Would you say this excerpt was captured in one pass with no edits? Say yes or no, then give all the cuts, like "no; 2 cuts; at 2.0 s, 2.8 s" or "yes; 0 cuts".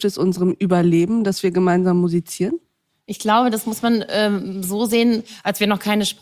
yes; 0 cuts